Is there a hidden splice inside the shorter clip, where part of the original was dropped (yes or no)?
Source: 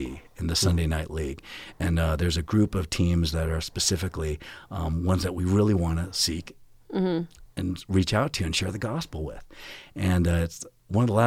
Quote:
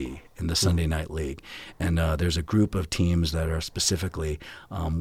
no